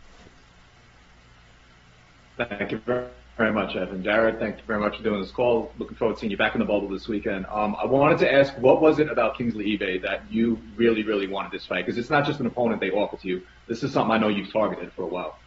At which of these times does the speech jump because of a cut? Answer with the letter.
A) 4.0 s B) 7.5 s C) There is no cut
C